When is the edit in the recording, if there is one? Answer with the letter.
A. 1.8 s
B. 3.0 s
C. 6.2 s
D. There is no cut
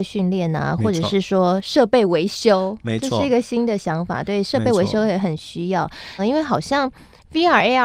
C